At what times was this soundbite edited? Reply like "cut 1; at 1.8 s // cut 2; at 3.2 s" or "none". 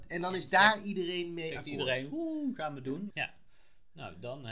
cut 1; at 3.1 s